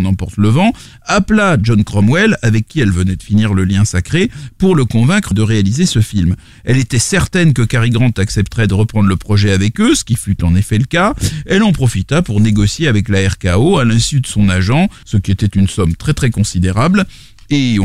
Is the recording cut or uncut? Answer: cut